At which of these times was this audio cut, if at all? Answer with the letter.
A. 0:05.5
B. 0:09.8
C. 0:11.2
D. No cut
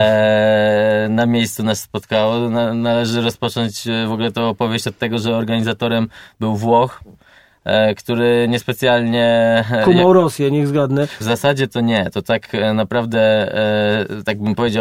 C